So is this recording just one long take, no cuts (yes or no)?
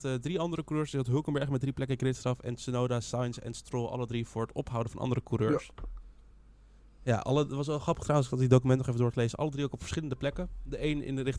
yes